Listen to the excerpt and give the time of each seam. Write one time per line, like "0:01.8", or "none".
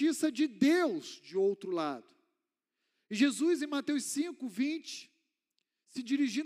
none